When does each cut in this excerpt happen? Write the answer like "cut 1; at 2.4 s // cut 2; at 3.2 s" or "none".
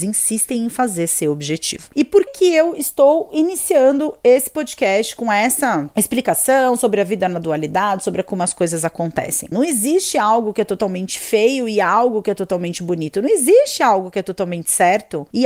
cut 1; at 2.3 s // cut 2; at 9.5 s